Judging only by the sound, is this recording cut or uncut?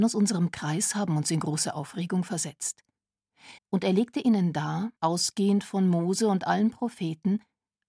cut